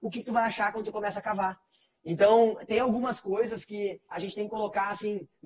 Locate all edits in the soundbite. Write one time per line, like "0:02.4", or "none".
0:04.1